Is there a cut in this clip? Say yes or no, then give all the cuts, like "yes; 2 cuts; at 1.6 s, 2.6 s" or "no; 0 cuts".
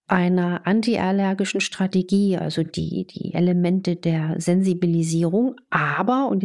no; 0 cuts